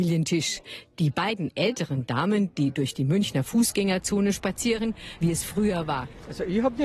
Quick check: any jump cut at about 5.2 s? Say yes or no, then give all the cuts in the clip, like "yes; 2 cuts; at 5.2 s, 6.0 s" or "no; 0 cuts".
yes; 1 cut; at 5.2 s